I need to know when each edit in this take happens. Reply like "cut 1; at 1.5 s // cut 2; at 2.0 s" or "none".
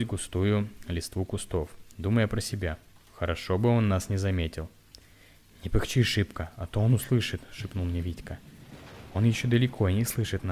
none

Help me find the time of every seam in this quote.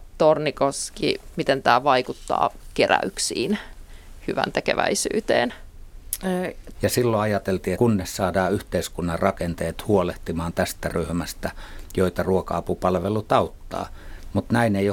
cut 1; at 1.3 s // cut 2; at 6.7 s // cut 3; at 7.8 s

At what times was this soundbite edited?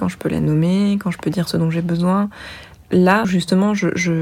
cut 1; at 3.2 s

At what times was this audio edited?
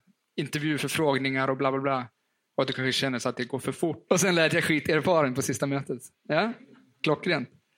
cut 1; at 4.1 s

